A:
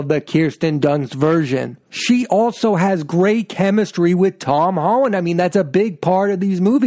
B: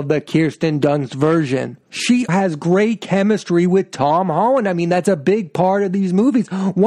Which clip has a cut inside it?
B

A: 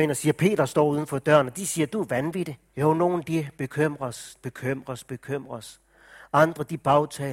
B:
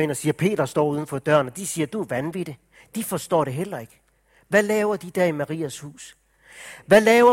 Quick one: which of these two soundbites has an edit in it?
A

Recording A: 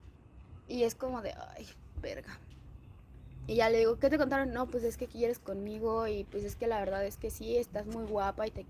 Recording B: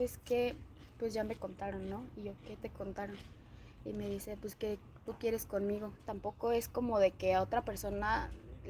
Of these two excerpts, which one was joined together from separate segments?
B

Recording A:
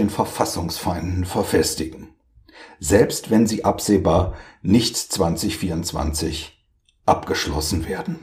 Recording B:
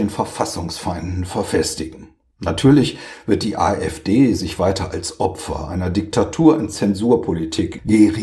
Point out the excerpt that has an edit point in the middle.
B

